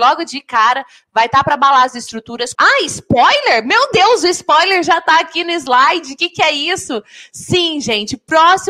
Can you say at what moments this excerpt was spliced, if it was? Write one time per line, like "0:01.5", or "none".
0:02.6